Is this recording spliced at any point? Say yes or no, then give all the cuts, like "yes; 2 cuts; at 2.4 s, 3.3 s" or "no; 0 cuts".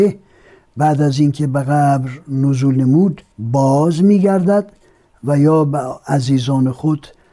yes; 1 cut; at 3.3 s